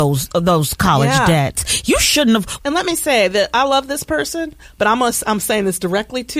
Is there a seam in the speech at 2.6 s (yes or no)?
yes